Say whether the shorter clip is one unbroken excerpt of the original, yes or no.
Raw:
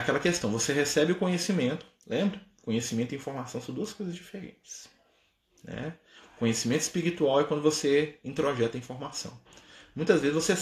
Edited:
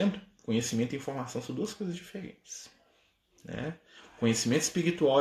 yes